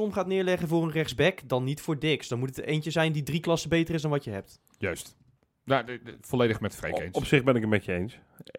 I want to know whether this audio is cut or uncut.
uncut